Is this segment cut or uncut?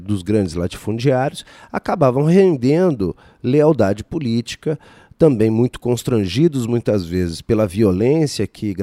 uncut